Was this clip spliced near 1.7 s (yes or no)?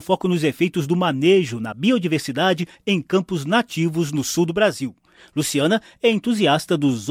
no